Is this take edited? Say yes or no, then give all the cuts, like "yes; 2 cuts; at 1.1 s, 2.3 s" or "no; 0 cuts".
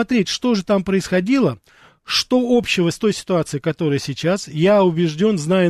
no; 0 cuts